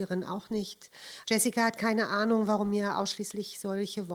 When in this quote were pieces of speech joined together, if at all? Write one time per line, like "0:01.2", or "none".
0:01.2